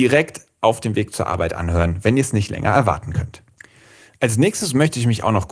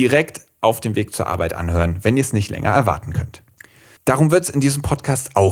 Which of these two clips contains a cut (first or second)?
second